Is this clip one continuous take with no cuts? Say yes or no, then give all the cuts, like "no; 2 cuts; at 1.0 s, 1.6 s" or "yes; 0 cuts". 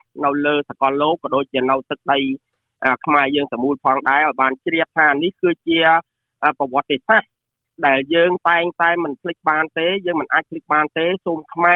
yes; 0 cuts